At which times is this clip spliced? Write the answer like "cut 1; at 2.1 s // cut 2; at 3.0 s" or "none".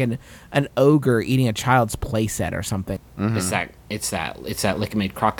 cut 1; at 3.0 s